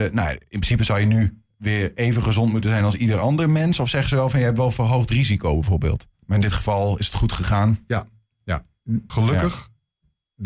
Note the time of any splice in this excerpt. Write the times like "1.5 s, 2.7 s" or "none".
6.2 s, 9.1 s